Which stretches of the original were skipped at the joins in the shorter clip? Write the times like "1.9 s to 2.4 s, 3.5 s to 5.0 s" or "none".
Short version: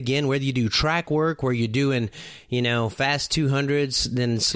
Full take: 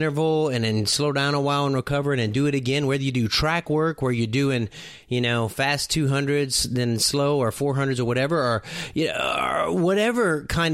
none